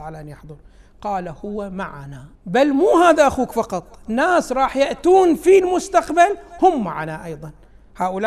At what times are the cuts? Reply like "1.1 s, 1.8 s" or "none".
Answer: 2.4 s